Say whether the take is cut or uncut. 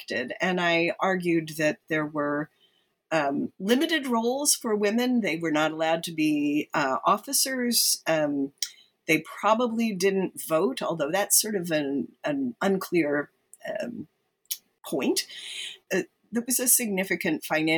cut